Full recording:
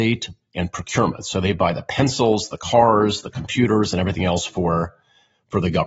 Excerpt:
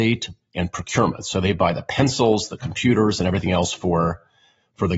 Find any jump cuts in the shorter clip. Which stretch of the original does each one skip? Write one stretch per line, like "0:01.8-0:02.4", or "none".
0:02.5-0:03.2

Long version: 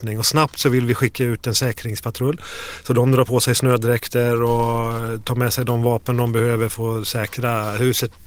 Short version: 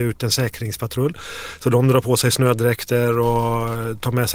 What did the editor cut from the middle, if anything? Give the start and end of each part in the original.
none

